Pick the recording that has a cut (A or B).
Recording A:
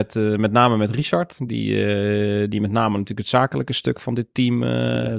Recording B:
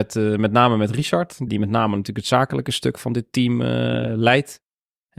B